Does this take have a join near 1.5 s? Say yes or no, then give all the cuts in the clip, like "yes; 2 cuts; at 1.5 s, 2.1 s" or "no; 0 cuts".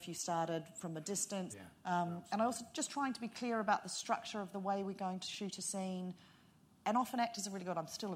yes; 1 cut; at 1.5 s